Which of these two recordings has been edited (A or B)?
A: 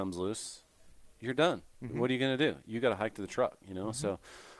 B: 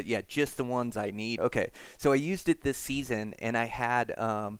B